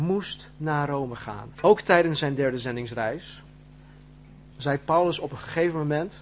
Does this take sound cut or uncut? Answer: cut